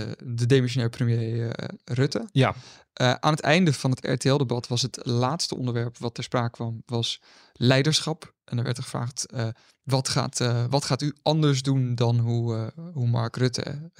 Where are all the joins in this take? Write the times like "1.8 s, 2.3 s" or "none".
none